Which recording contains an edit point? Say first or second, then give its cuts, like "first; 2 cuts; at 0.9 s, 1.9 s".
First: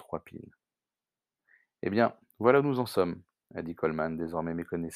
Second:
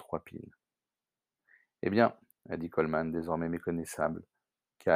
second; 1 cut; at 2.3 s